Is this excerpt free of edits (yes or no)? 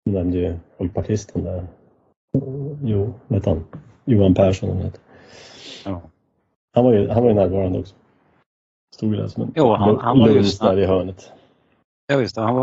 yes